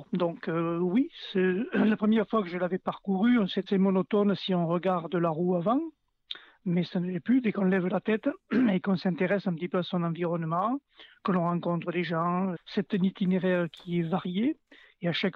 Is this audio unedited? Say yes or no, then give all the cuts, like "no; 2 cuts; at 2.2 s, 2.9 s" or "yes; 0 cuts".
no; 2 cuts; at 3.7 s, 12.5 s